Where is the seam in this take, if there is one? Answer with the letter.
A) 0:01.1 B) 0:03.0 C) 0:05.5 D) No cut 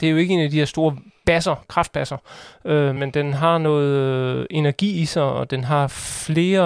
B